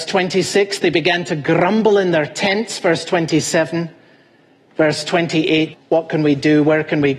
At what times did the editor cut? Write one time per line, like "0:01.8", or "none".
0:05.7